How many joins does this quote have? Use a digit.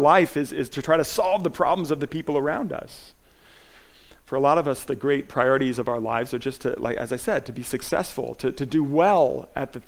0